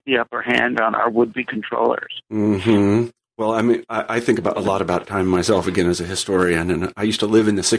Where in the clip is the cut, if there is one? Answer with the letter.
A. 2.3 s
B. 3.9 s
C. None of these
C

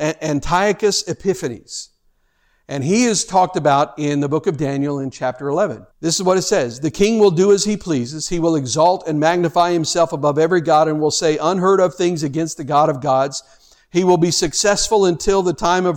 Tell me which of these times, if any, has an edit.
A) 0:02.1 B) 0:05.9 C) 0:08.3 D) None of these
B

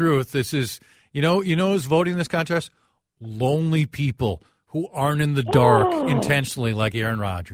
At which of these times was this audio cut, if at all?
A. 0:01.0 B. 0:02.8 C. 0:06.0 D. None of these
D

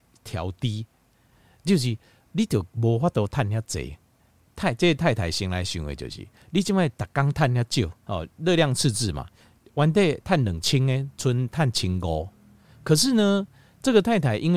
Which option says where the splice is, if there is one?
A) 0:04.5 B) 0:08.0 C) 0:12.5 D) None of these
B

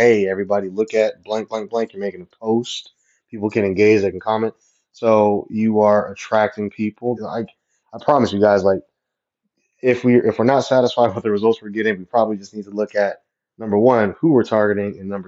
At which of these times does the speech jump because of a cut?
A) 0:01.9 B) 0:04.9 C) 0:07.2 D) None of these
C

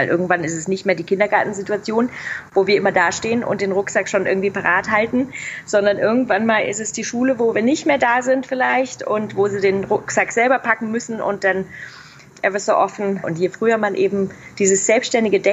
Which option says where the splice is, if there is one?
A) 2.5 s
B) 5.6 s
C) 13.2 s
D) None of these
C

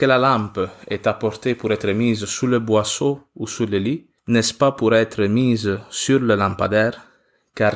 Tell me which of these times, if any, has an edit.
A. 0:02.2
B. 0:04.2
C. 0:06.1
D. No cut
B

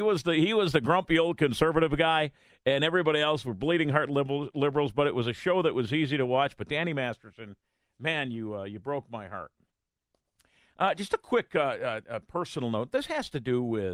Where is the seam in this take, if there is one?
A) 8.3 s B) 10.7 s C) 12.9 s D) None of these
D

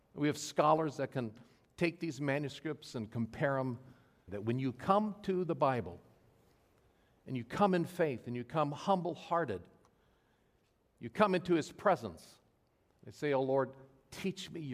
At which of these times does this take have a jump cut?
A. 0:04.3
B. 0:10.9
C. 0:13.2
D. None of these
A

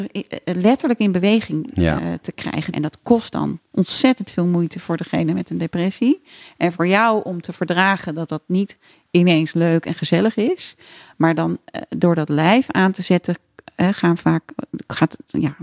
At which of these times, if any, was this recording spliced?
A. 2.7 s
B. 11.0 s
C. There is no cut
A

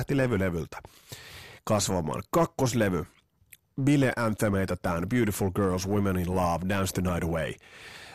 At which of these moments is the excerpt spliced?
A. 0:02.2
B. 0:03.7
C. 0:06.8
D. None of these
D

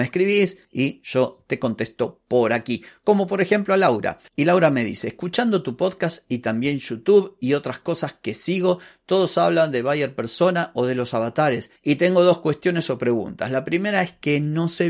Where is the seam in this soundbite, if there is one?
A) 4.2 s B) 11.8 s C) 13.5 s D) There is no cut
A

